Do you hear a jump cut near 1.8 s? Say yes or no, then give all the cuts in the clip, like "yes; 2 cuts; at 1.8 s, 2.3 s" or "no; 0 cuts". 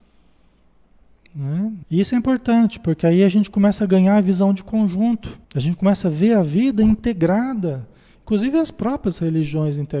yes; 2 cuts; at 1.8 s, 5.4 s